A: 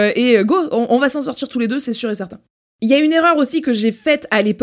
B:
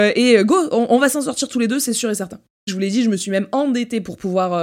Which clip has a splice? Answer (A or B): B